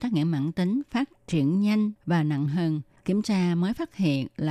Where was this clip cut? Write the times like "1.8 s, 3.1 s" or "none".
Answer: 3.0 s